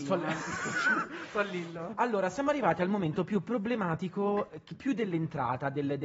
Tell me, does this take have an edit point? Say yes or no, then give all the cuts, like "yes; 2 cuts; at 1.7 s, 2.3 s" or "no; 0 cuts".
no; 0 cuts